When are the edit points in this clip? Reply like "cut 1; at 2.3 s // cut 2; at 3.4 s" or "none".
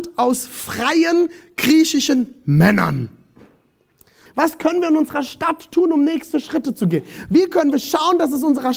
cut 1; at 4.3 s